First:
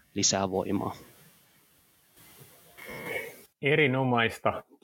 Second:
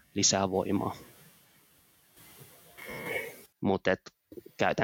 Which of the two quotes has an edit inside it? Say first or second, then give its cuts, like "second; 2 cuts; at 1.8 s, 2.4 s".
second; 1 cut; at 3.5 s